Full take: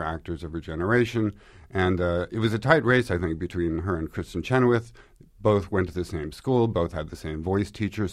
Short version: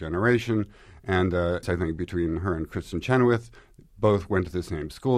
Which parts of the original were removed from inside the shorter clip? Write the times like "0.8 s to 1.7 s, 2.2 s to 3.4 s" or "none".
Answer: 2.3 s to 3.0 s

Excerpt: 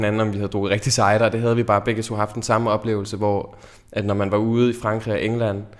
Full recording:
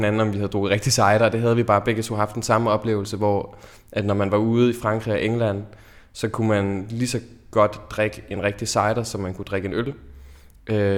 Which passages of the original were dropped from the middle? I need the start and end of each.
none

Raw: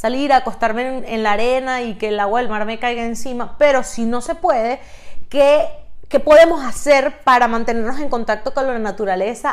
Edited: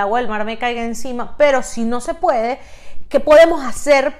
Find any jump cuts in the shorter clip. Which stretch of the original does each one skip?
5.3 s to 6.1 s

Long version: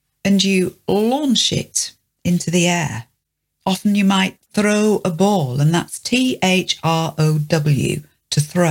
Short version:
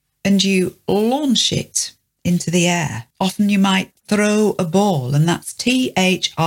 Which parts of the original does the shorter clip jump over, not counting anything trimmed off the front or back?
3.1 s to 3.6 s

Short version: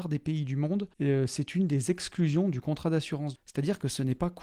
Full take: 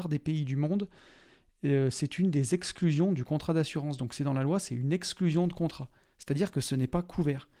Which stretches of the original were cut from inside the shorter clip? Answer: 0.9 s to 1.6 s, 4.0 s to 6.1 s

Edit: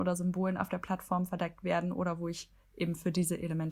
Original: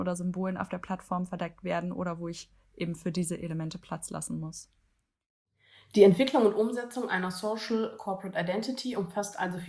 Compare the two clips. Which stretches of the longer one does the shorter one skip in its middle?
none

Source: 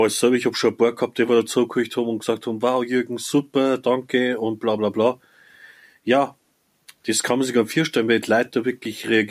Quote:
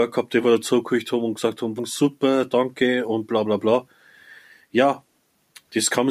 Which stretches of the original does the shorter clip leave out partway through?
2.6 s to 3.1 s

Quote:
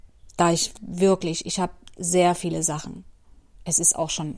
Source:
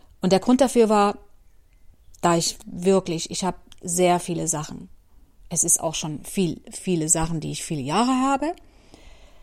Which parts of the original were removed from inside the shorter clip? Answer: none

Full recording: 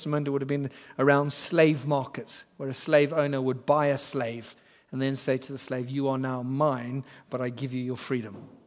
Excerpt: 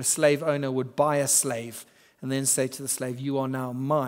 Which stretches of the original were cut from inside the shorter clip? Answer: none

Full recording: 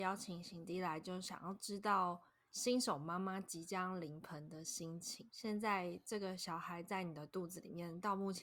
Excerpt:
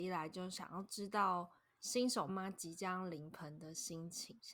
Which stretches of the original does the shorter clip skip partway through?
3.0 s to 3.2 s

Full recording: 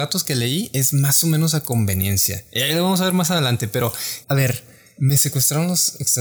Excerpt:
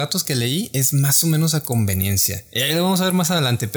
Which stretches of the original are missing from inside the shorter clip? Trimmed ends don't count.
none

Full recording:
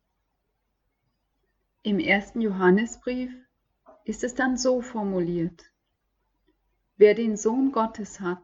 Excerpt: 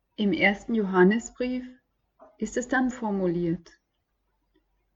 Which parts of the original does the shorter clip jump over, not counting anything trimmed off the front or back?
4.6 s to 4.8 s

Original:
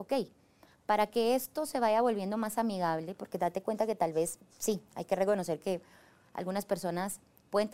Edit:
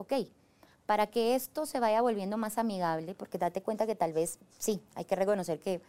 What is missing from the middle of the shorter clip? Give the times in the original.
none

